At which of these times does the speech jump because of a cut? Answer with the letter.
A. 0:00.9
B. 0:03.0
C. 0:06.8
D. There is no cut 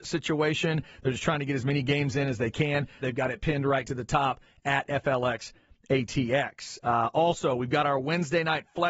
B